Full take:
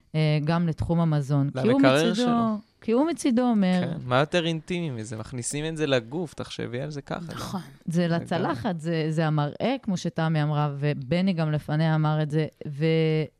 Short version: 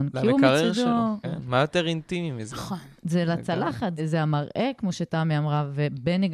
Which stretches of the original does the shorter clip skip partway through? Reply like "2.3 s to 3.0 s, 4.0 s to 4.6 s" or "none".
2.6 s to 3.8 s, 5.1 s to 7.3 s, 8.8 s to 9.0 s